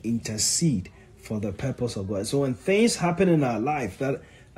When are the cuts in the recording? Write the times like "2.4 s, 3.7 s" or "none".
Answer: none